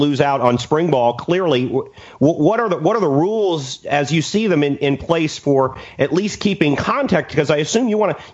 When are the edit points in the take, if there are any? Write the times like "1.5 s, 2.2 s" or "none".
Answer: none